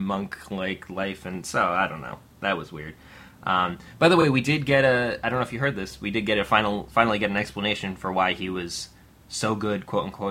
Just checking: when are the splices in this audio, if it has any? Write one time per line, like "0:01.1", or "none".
none

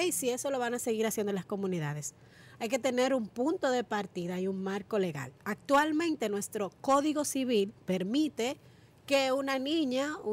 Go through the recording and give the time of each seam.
none

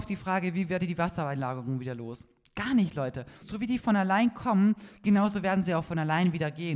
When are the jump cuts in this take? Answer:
0:03.4

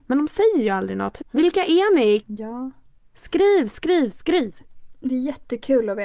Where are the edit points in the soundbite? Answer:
0:01.2
0:02.2

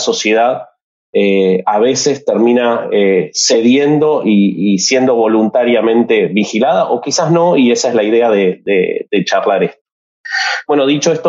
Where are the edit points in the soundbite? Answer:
none

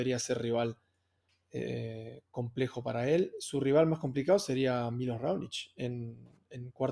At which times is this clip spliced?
none

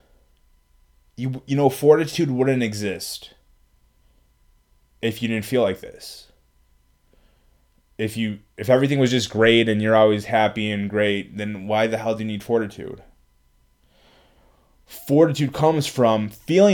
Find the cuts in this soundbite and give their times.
none

